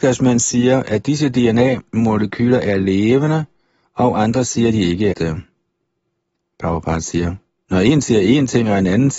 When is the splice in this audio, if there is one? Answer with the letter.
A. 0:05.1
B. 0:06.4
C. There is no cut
A